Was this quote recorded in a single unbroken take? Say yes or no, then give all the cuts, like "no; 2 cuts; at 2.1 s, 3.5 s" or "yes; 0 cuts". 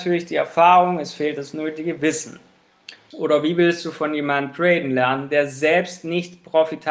no; 1 cut; at 3.1 s